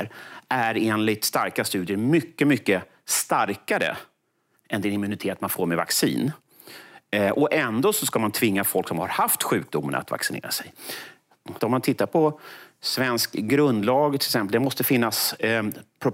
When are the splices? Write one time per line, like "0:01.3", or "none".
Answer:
0:11.6